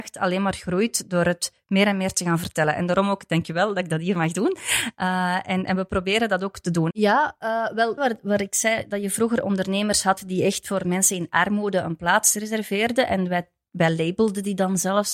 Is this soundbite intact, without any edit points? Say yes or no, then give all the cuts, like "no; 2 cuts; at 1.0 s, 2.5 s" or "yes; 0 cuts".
no; 2 cuts; at 6.9 s, 8.0 s